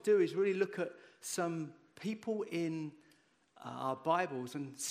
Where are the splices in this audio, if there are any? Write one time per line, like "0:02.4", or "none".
none